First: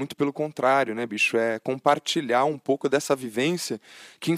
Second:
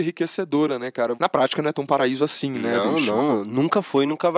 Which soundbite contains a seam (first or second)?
second